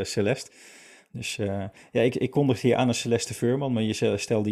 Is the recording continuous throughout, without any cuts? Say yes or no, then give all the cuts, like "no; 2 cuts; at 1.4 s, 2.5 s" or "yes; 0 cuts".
yes; 0 cuts